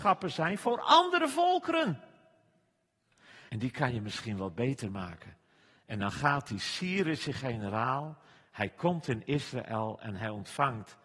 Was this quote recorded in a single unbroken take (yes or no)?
no